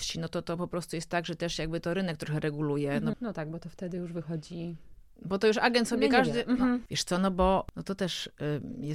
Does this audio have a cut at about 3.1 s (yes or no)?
yes